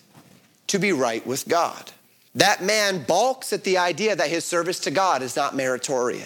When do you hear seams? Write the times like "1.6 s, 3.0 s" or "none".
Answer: 2.3 s

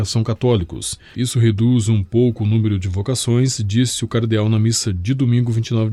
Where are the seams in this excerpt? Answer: 1.1 s

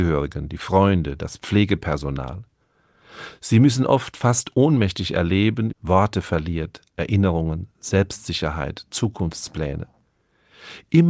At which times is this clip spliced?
5.7 s

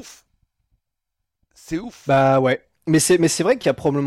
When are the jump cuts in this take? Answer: none

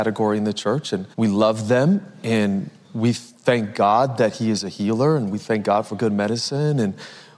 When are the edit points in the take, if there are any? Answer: 1.1 s

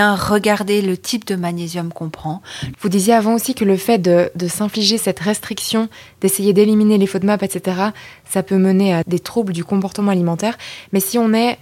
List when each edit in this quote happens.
2.7 s

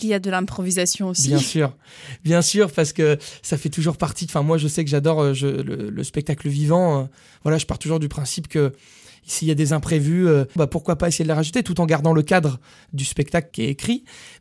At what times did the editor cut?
10.6 s

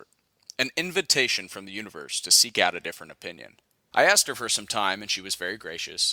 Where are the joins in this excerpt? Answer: 3.9 s

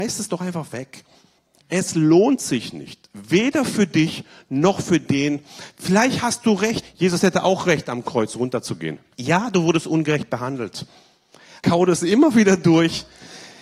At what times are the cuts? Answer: 6.8 s, 9.1 s, 11.6 s

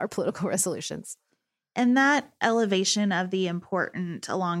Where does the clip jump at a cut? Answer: none

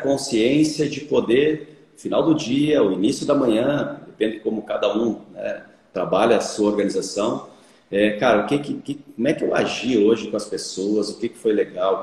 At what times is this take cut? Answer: none

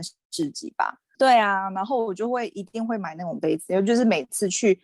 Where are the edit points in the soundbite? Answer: 1.1 s

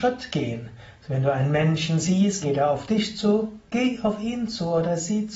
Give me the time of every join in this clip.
2.4 s

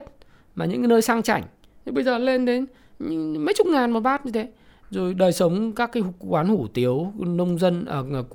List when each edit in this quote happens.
none

